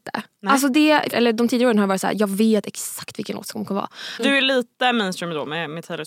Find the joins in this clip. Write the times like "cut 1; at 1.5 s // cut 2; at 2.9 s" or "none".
cut 1; at 1.1 s // cut 2; at 4.2 s